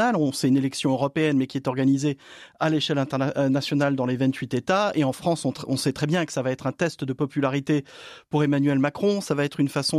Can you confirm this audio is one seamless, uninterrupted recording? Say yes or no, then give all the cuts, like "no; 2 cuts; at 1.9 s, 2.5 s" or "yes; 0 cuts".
yes; 0 cuts